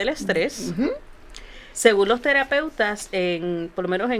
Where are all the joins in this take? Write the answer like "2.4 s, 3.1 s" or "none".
1.7 s